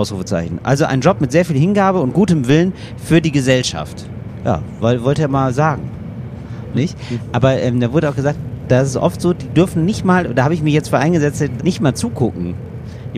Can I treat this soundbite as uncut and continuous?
no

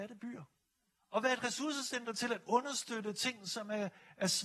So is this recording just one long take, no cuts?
yes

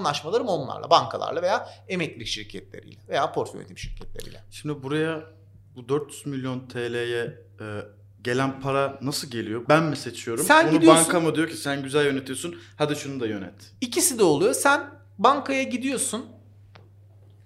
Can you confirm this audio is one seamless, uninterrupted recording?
no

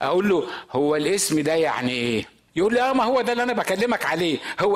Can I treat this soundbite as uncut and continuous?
no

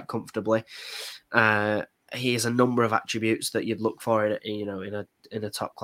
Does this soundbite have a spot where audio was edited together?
yes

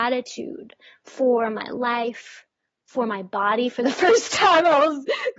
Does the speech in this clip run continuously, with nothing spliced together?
yes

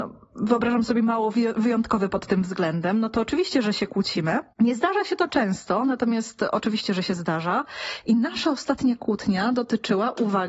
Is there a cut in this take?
yes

